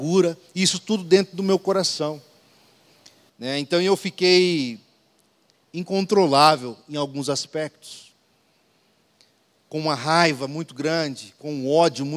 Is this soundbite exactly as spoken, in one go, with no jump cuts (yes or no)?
no